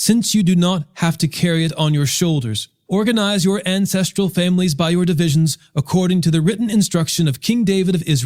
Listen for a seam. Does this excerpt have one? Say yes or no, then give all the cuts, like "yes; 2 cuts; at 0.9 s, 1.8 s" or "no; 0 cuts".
yes; 1 cut; at 2.9 s